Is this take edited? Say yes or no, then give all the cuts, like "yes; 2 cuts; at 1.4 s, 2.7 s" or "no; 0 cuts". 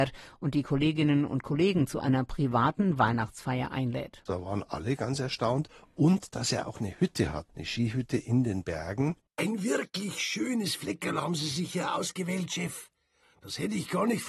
no; 0 cuts